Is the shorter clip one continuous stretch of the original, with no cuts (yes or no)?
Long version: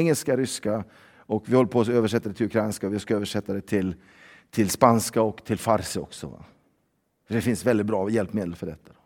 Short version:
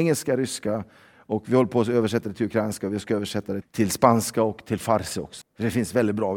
no